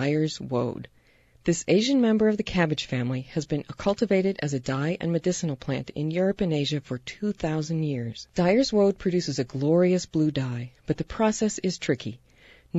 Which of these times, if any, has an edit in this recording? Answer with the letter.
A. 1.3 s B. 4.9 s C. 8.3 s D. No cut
D